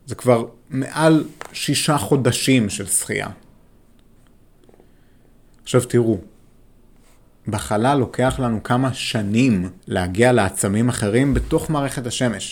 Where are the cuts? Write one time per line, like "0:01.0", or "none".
0:09.8